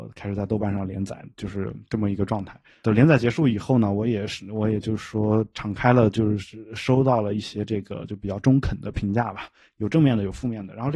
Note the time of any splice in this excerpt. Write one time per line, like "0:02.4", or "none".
none